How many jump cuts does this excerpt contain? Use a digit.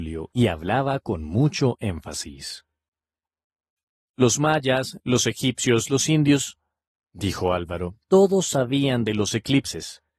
2